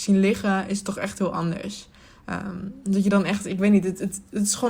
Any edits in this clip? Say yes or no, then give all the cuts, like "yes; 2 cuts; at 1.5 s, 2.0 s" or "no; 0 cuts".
no; 0 cuts